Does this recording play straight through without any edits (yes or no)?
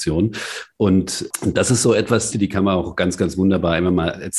no